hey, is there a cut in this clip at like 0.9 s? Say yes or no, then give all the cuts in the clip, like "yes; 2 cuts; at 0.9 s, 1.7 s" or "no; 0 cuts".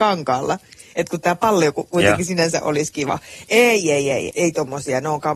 no; 1 cut; at 4.3 s